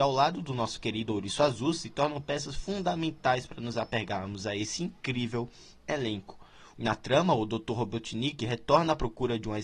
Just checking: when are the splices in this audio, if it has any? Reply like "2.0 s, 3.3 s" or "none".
6.7 s